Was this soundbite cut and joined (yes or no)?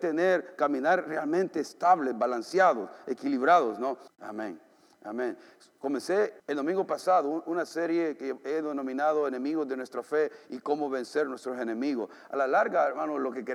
yes